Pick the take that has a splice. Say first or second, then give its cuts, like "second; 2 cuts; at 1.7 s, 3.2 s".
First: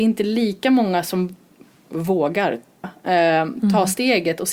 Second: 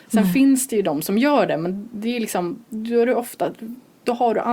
first; 1 cut; at 2.8 s